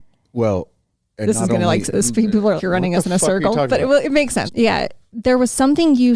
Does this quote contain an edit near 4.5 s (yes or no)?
yes